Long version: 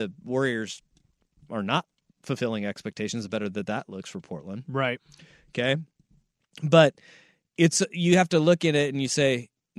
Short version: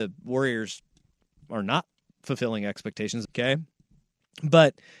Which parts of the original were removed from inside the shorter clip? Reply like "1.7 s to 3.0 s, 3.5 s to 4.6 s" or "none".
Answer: 3.3 s to 5.4 s